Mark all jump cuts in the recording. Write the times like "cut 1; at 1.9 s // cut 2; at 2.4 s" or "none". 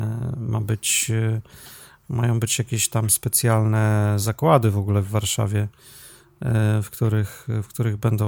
none

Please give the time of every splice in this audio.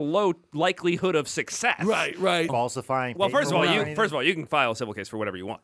cut 1; at 2.5 s

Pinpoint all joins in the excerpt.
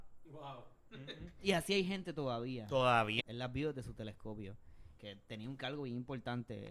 cut 1; at 3.2 s // cut 2; at 5.0 s

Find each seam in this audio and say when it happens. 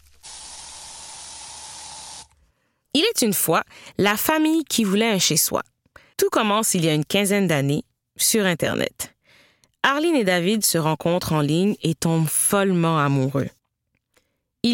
cut 1; at 6.1 s

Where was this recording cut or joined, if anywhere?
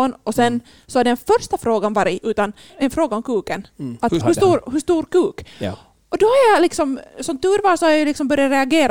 cut 1; at 2.2 s // cut 2; at 4.2 s

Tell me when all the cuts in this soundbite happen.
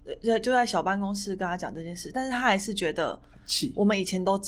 none

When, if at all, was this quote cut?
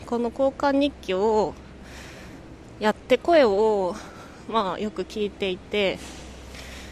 none

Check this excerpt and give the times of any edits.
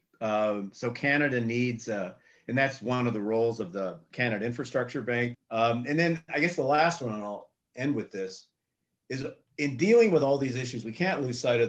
cut 1; at 5.3 s

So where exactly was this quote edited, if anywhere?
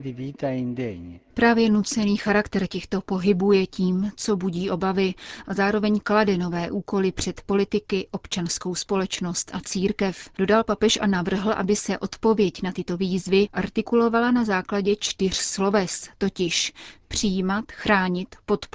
none

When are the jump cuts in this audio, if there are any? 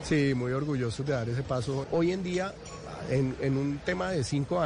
cut 1; at 1.8 s

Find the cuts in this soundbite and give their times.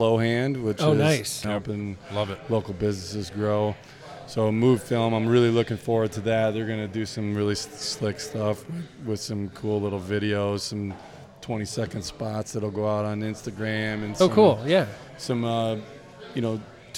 cut 1; at 1.4 s

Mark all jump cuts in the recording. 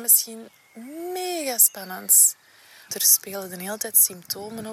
cut 1; at 2.9 s

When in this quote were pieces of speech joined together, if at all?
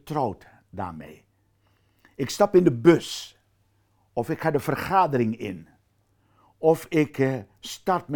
none

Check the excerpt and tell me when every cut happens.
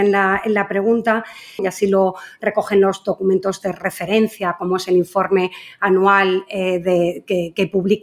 cut 1; at 1.6 s

